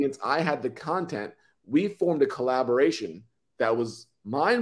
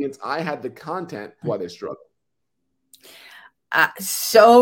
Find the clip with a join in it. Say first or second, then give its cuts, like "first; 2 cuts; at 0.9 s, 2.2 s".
second; 1 cut; at 1.4 s